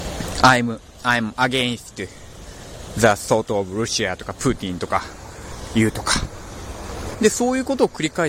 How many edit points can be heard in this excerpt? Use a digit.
1